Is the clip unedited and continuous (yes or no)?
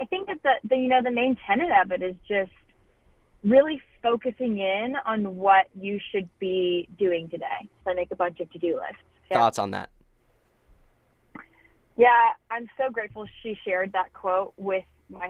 no